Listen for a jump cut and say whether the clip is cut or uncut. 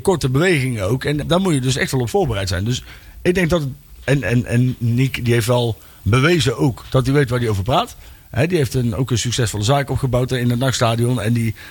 cut